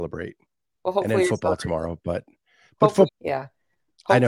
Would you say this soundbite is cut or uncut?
cut